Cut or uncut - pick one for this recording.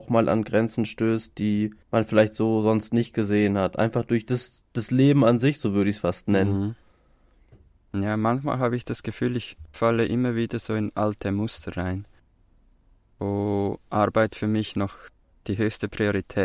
cut